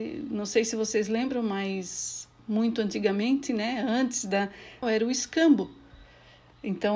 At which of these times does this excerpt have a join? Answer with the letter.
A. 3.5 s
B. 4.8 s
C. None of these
B